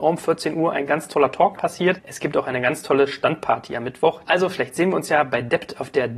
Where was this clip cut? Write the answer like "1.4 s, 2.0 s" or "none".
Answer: 1.6 s, 4.2 s

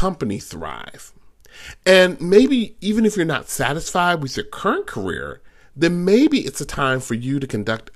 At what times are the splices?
none

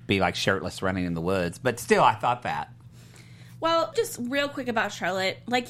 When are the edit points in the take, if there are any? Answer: 3.9 s

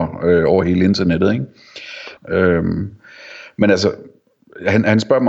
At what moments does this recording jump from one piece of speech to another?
2.2 s

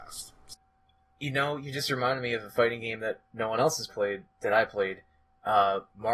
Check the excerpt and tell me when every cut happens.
3.9 s

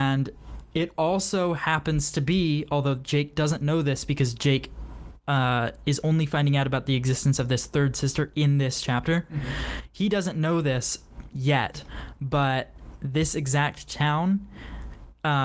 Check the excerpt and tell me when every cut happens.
none

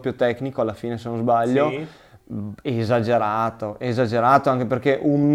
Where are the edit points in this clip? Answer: none

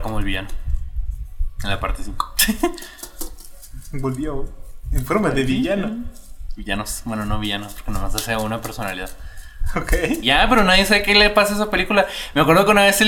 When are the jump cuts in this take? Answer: 10.2 s

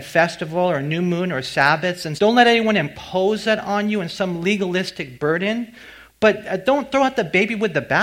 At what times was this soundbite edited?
2.2 s

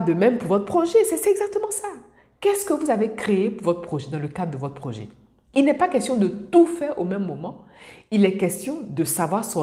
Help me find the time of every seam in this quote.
none

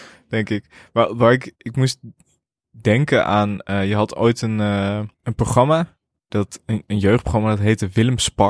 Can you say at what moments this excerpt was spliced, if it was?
5.1 s

